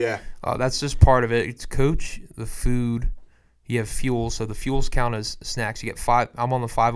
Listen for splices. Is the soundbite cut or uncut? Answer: uncut